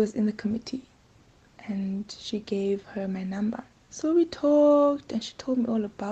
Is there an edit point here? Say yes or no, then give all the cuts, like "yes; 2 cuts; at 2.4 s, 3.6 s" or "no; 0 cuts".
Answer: no; 0 cuts